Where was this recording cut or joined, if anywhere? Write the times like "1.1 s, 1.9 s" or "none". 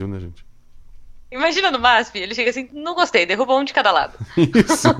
1.3 s, 2.7 s

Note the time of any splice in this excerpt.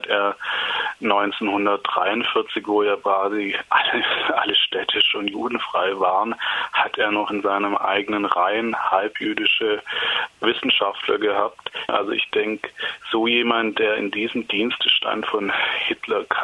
11.9 s

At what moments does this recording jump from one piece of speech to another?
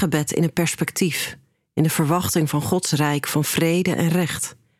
none

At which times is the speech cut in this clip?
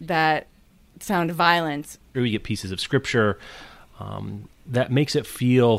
2.1 s

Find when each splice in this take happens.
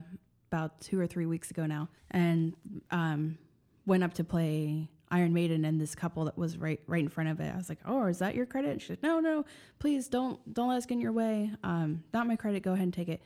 2.0 s

